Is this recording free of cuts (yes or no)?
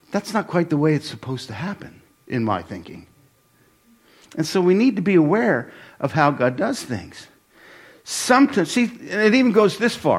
yes